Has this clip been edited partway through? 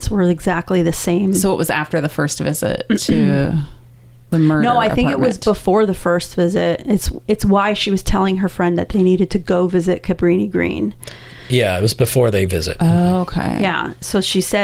no; 0 cuts

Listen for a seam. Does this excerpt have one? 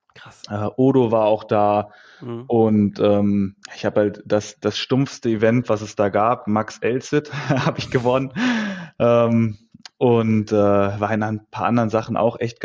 yes; 1 cut; at 3.6 s

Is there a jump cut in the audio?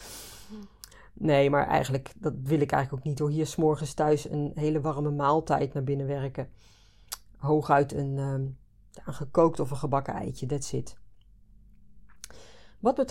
no; 0 cuts

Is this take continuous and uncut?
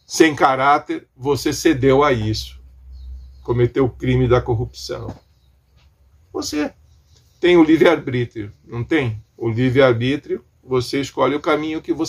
no; 2 cuts; at 6.1 s, 9.3 s

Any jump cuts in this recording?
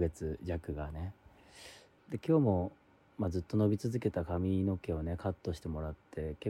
yes; 1 cut; at 1.9 s

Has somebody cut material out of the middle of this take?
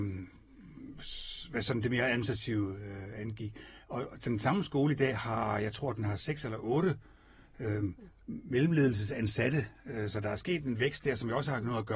no; 0 cuts

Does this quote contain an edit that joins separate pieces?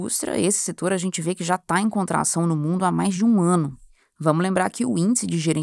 no; 0 cuts

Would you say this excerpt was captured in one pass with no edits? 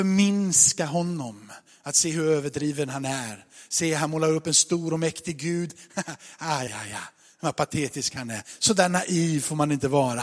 no; 1 cut; at 6.7 s

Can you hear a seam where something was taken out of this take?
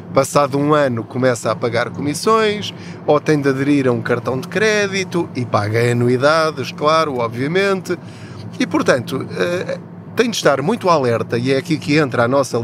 no; 0 cuts

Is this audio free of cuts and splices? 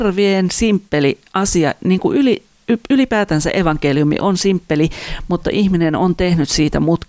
yes; 0 cuts

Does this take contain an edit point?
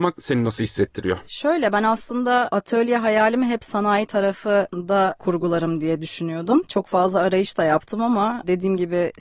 no; 0 cuts

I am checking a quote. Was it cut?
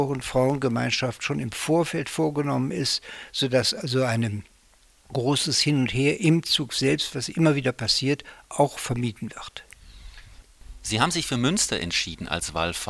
no; 0 cuts

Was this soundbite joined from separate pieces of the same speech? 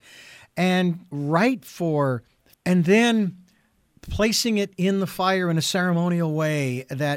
yes; 1 cut; at 2.5 s

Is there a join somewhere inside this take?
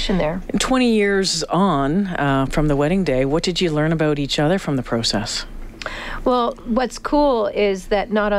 yes; 1 cut; at 2.5 s

